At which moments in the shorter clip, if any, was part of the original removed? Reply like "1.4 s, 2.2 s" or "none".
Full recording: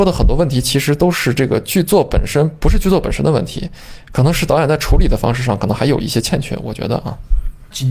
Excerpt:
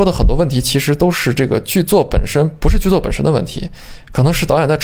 none